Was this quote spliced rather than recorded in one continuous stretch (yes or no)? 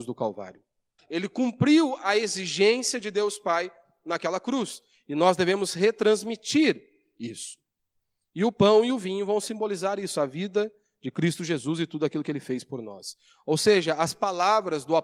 yes